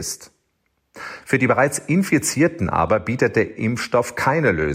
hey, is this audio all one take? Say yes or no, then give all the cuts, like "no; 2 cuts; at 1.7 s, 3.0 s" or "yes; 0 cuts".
yes; 0 cuts